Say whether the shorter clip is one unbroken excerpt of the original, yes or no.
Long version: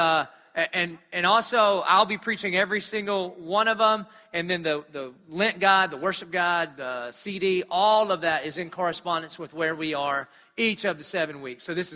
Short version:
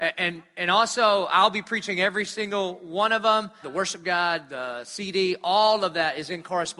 no